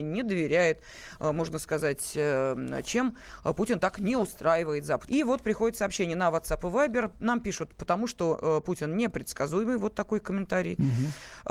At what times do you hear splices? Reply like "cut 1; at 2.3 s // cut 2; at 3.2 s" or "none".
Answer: cut 1; at 5.1 s